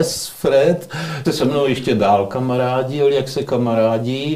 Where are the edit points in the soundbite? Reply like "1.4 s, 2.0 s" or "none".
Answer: 1.2 s